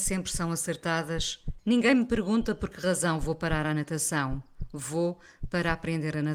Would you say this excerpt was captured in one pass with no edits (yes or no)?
no